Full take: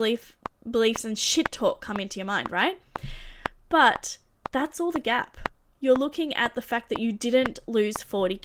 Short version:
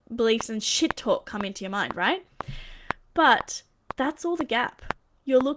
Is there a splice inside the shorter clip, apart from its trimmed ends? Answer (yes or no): no